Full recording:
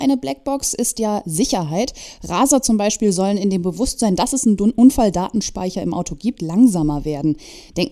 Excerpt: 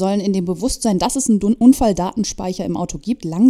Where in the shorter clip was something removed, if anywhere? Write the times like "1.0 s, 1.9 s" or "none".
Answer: none